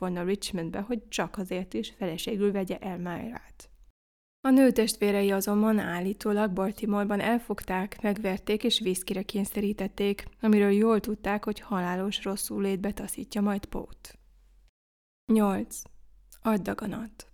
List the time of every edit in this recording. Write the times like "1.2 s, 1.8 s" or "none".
none